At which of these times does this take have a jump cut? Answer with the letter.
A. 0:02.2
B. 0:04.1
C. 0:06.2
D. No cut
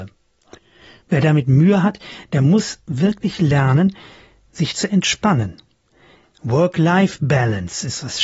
C